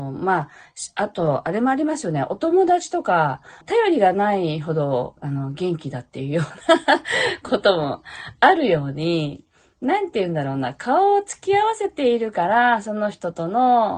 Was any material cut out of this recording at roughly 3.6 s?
yes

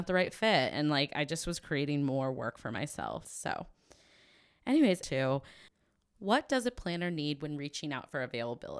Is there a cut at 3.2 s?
yes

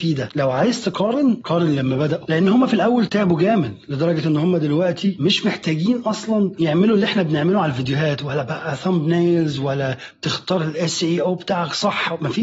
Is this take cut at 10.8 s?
no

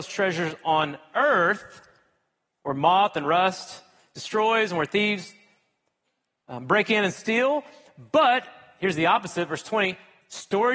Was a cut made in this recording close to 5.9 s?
no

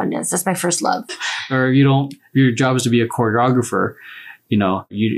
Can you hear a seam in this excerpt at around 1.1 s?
yes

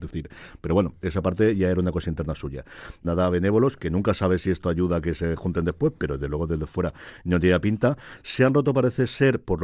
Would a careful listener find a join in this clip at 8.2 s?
no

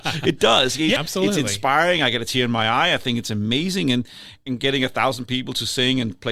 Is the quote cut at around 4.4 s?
yes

